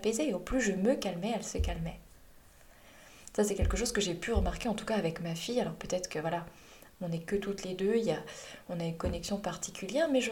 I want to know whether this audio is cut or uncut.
uncut